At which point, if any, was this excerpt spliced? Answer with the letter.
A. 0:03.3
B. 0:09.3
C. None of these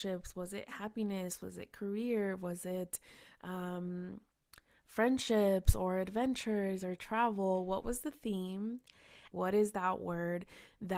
B